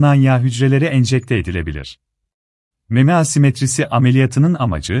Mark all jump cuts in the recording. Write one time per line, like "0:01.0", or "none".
0:02.7